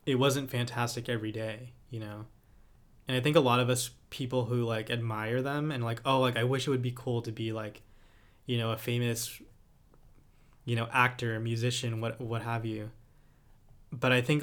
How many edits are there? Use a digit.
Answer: 0